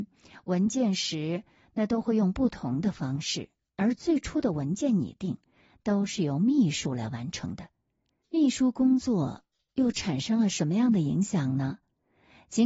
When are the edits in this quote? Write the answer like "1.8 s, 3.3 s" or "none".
8.2 s